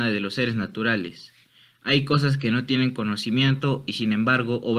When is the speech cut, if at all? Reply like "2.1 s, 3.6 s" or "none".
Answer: none